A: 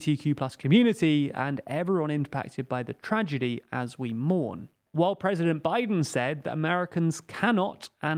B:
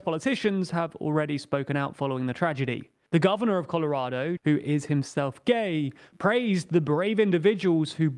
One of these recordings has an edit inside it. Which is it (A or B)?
B